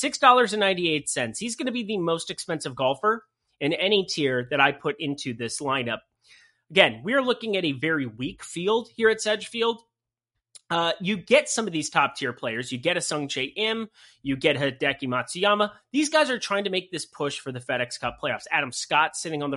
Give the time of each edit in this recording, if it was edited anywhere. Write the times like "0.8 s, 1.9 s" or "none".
none